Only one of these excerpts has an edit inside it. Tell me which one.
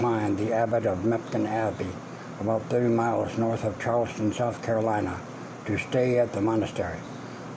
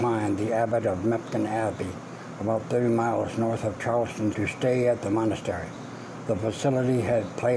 second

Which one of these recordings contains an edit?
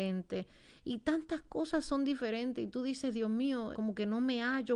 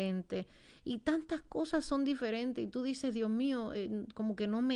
first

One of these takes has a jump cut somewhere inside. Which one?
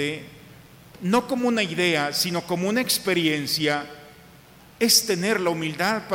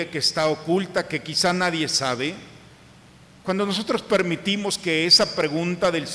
first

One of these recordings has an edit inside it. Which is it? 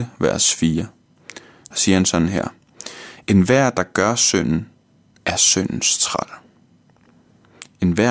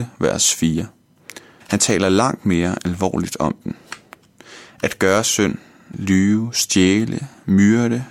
second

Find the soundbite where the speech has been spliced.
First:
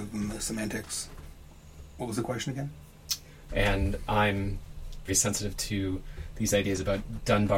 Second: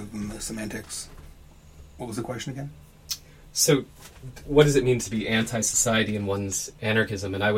first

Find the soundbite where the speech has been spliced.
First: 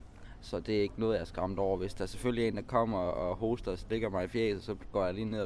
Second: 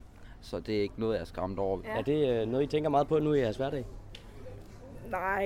second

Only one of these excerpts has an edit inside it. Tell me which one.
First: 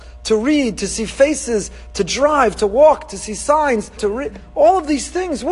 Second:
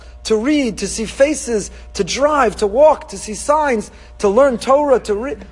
first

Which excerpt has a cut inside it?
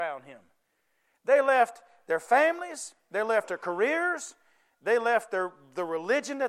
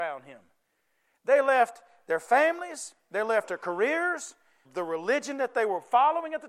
second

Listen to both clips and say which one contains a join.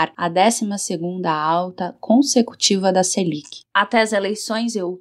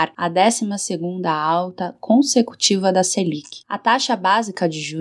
first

